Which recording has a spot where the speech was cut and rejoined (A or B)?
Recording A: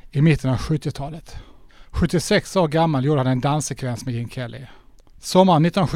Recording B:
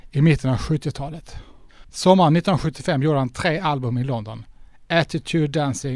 B